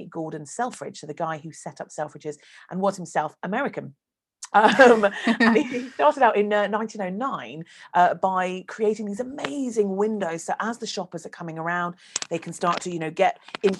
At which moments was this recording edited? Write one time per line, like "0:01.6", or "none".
0:04.5